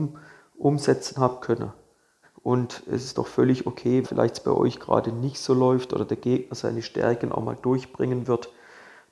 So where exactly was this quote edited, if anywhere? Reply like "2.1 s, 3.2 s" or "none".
2.2 s, 4.0 s

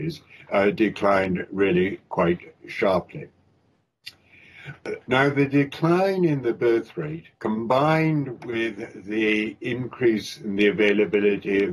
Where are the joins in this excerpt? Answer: 5.0 s, 7.3 s

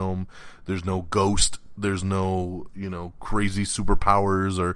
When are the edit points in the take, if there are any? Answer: none

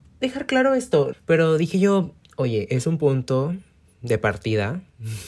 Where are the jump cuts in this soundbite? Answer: 1.1 s

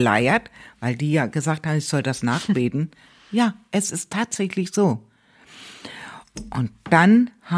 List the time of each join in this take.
none

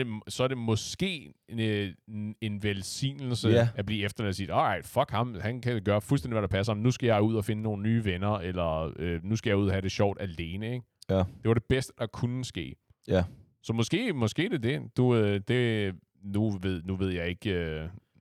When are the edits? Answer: none

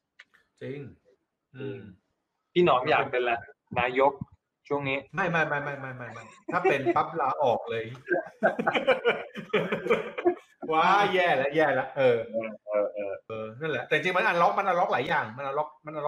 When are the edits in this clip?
13.3 s

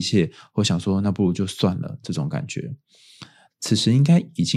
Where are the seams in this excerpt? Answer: 3.5 s

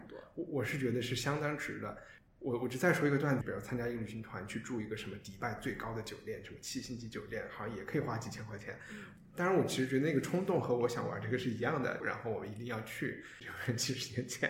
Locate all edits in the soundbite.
3.4 s, 12.0 s, 13.4 s

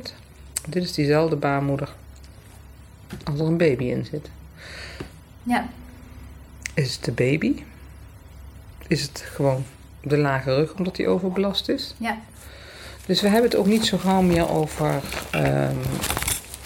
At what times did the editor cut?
5.4 s

